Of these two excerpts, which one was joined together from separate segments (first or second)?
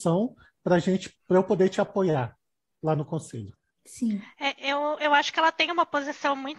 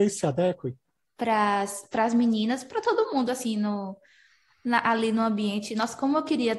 second